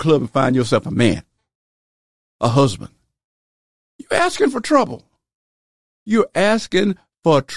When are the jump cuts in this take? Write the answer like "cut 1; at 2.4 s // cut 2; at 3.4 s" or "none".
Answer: none